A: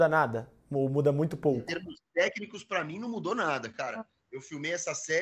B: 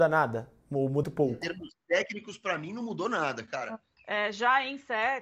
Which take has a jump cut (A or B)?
B